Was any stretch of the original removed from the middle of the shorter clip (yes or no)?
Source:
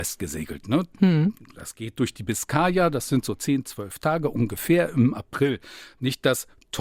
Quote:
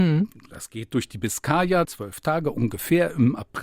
yes